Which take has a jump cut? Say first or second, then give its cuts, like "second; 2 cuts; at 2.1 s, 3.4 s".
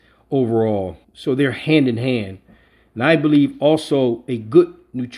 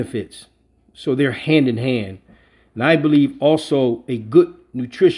first; 1 cut; at 1.0 s